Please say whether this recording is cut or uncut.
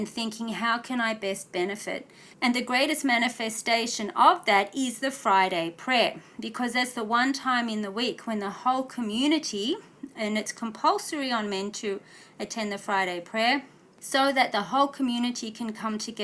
cut